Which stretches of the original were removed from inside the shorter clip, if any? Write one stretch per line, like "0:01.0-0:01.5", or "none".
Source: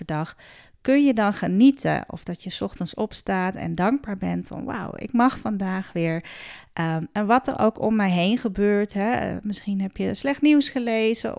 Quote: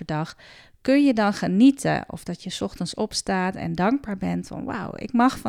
none